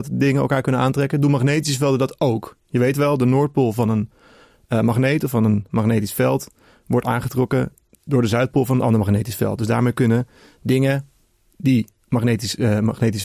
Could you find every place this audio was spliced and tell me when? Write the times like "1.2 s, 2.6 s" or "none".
none